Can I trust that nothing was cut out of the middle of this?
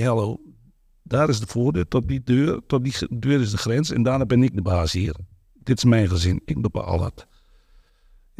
yes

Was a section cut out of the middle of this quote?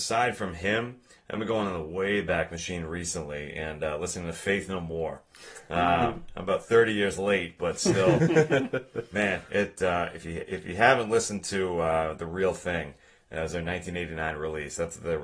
no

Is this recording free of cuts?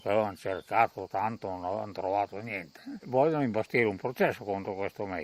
no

